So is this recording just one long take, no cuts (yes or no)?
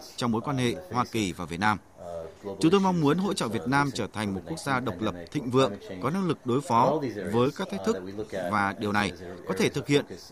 yes